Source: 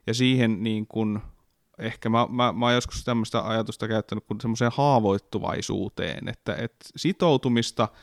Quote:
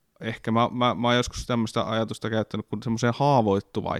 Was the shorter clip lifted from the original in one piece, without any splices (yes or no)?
yes